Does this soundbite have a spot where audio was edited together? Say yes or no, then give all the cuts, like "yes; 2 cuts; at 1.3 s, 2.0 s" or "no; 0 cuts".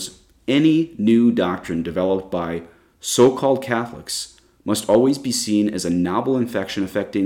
no; 0 cuts